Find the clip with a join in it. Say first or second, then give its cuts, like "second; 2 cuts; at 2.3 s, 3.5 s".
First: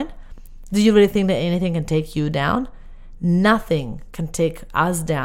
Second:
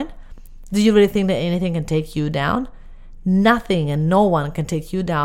second; 1 cut; at 3.2 s